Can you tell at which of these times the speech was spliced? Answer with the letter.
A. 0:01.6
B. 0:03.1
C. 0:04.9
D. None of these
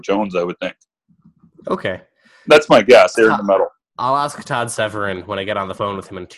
B